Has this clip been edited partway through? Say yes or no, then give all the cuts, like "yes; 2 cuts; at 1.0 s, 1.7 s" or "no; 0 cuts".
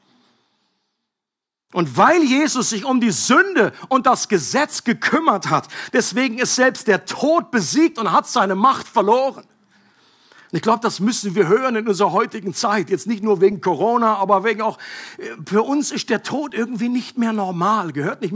no; 0 cuts